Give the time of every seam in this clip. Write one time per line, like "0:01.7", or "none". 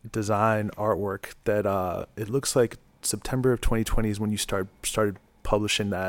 none